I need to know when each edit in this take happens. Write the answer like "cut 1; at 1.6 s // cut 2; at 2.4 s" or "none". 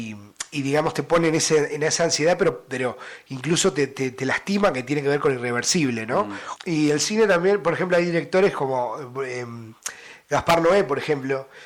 cut 1; at 6.6 s